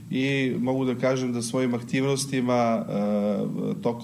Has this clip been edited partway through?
no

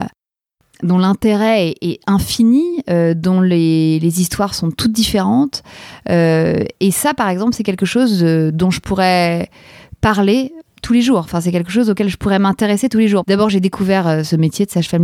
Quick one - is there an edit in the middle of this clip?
yes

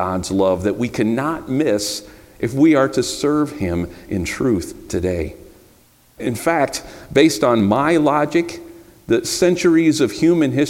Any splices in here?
yes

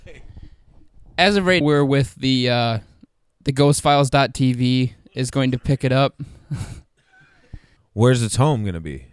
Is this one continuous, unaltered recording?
no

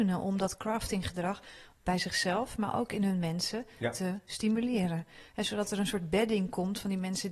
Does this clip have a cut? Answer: no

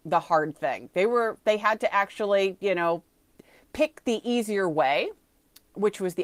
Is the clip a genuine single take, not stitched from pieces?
yes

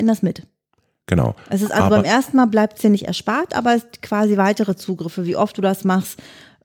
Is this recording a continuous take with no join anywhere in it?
yes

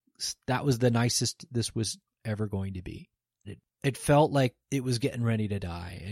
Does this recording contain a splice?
yes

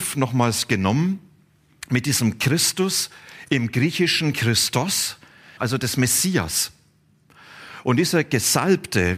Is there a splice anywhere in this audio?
yes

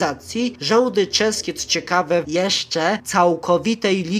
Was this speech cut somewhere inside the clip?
yes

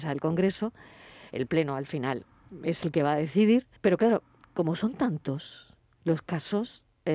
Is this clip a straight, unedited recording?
no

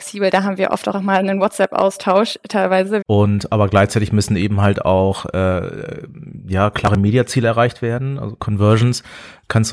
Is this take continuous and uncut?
no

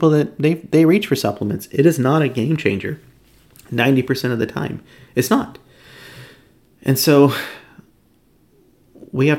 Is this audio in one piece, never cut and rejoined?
yes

